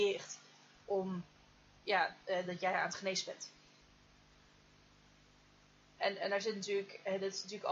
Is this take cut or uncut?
cut